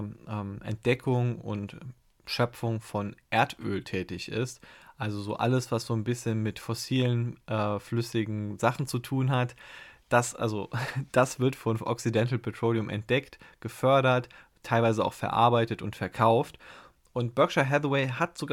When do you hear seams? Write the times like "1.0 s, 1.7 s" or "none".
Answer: none